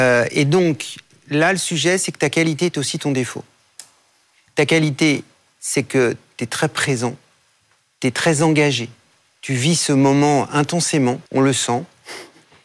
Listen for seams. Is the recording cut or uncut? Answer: cut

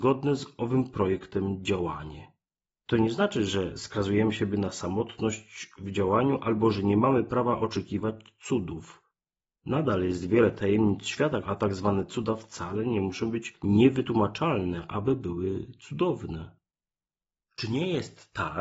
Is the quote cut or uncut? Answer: cut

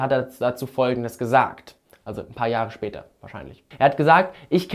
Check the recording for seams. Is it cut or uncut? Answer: uncut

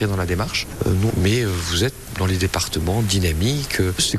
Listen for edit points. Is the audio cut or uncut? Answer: cut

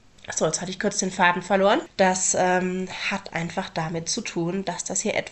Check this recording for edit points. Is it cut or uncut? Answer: uncut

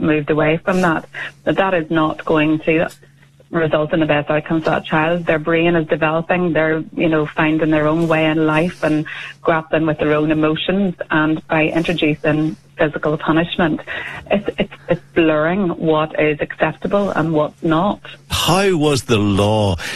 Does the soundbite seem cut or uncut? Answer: cut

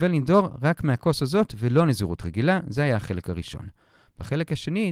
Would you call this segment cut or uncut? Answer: uncut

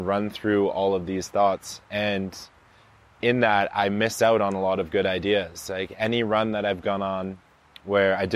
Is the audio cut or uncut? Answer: uncut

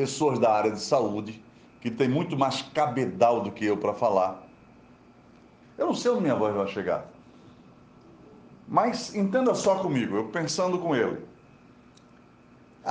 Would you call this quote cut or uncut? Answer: cut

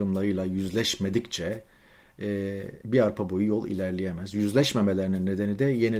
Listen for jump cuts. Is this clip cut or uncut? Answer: cut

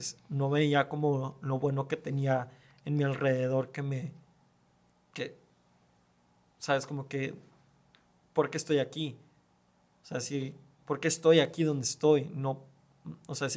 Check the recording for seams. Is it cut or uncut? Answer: cut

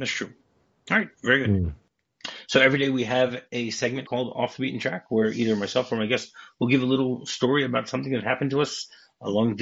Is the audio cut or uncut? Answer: uncut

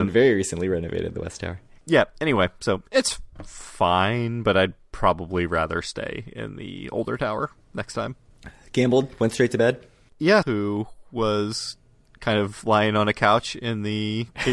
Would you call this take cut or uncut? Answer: cut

